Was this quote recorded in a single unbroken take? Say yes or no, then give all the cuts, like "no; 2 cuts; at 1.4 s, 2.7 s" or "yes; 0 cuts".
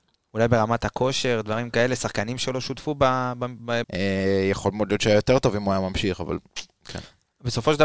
no; 1 cut; at 3.8 s